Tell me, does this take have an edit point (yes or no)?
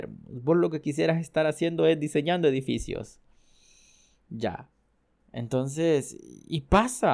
no